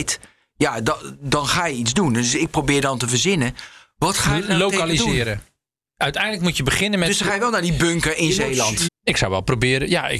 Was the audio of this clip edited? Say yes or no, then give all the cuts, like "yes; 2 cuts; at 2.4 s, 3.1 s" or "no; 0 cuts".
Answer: yes; 1 cut; at 8.9 s